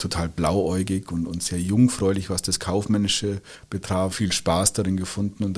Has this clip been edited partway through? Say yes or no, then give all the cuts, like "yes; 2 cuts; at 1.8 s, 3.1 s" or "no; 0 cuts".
yes; 1 cut; at 4.1 s